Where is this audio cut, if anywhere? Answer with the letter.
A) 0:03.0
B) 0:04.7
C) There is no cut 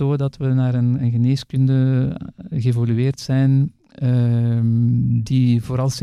C